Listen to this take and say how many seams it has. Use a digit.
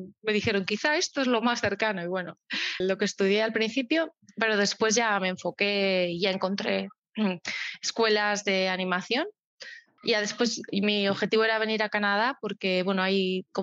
2